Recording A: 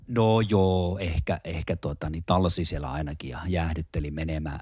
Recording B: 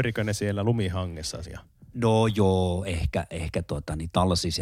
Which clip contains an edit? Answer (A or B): B